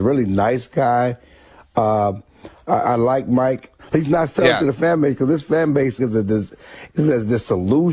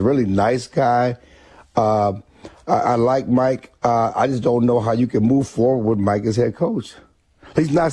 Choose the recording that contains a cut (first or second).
first